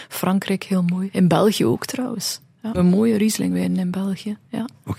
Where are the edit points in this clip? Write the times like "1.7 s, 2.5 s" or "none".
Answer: 2.7 s